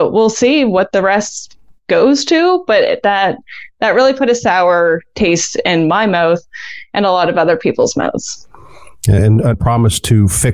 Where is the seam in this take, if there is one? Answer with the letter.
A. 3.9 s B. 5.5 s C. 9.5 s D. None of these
C